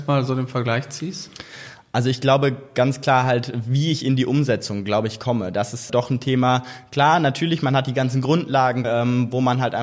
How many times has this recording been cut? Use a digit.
2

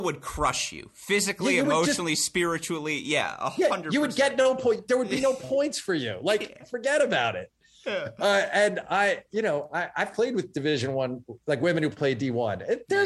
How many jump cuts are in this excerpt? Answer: 0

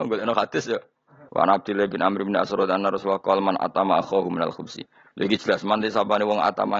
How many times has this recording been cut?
1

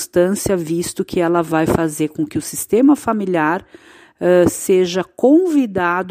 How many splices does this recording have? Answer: 0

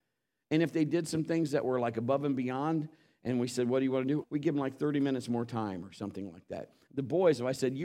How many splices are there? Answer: 2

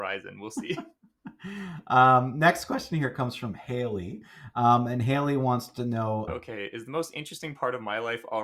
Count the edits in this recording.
1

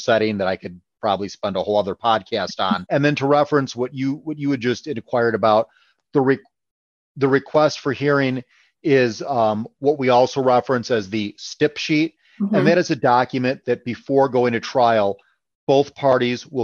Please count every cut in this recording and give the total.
1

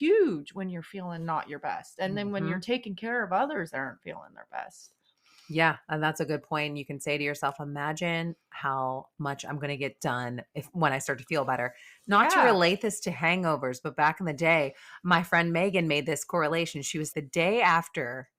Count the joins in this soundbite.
1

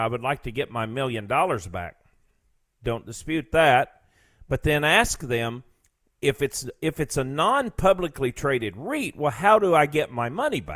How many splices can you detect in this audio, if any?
1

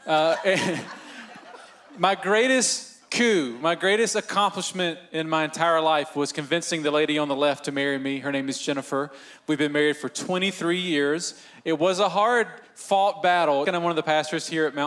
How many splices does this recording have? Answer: 1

